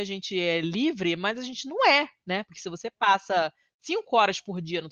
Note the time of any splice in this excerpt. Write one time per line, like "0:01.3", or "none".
none